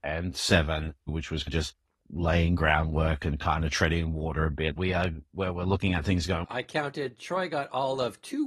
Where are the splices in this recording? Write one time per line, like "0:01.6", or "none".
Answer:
0:01.1
0:04.8
0:06.4